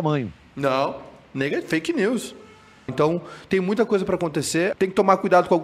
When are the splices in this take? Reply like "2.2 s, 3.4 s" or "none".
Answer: 2.9 s, 4.7 s